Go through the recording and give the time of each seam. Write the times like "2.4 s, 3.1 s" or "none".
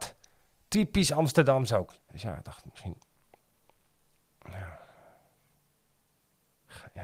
2.0 s

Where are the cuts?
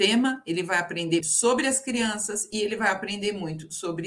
1.2 s

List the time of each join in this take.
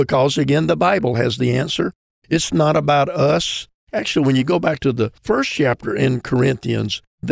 2.1 s, 3.8 s

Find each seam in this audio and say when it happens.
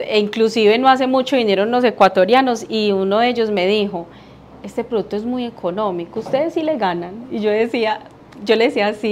none

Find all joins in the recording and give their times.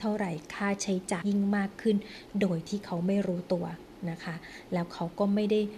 1.2 s

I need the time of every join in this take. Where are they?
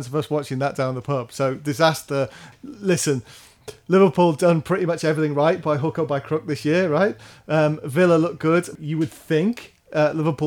none

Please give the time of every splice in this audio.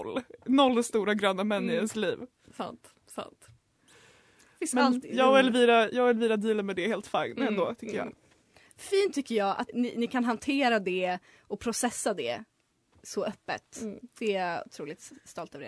9.7 s

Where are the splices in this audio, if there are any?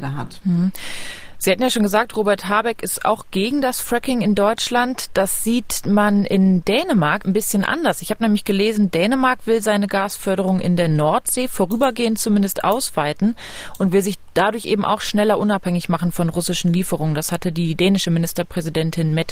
7.2 s

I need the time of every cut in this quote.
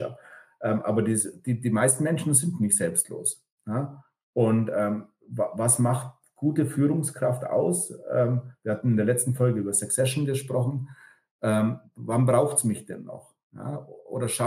none

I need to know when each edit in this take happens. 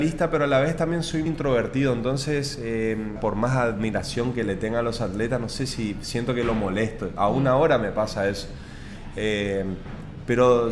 1.3 s, 3.2 s

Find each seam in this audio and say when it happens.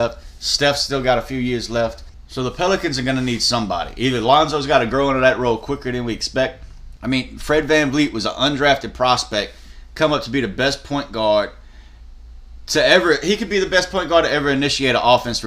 7.0 s

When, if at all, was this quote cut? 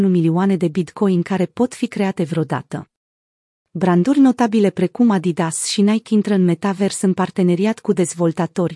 none

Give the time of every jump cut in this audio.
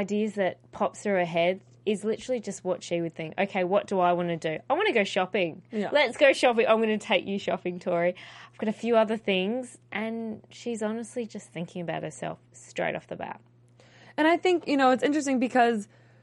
none

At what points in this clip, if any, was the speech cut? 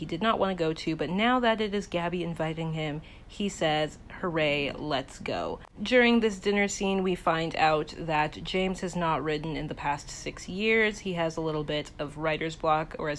none

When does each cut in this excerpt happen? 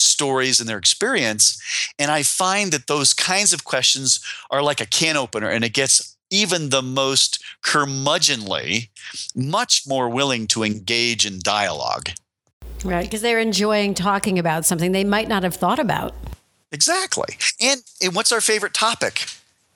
none

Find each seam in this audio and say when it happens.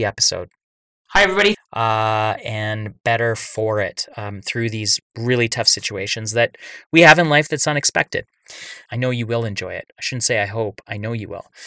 1.5 s, 8.9 s

